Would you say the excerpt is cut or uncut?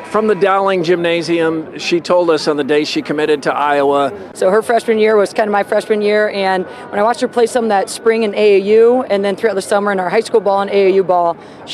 cut